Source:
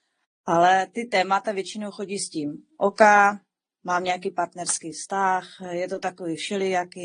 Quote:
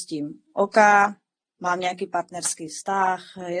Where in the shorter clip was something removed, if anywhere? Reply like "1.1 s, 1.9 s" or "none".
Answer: none